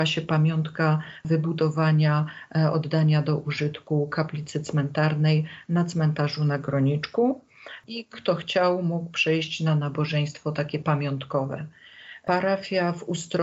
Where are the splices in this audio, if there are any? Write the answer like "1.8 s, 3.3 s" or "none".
none